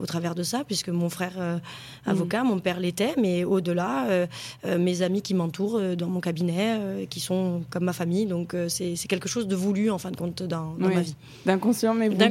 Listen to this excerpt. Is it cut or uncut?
uncut